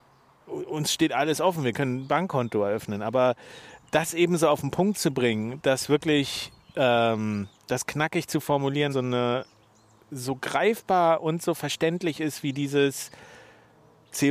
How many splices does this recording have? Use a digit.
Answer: 2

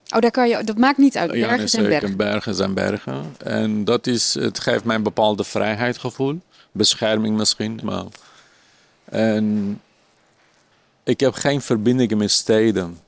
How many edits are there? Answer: 1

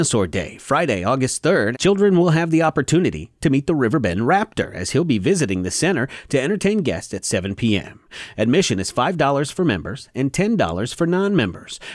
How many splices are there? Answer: 2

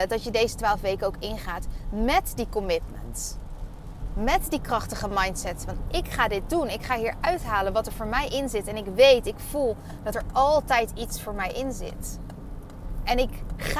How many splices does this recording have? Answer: 0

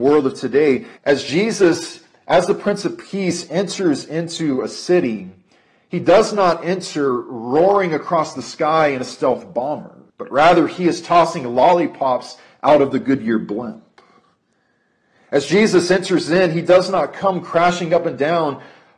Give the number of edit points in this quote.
2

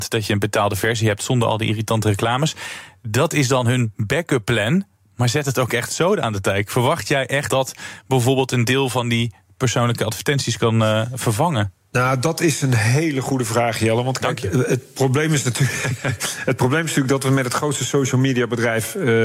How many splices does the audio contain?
1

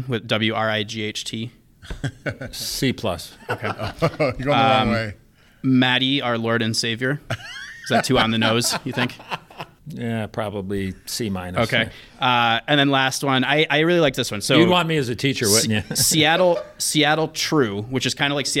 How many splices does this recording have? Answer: 0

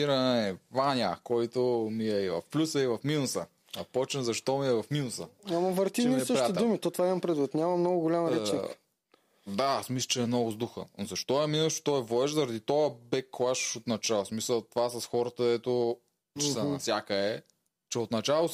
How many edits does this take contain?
2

